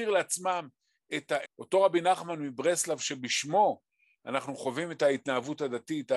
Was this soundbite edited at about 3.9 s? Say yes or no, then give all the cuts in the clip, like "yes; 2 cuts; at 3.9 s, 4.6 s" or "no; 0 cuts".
no; 1 cut; at 1.4 s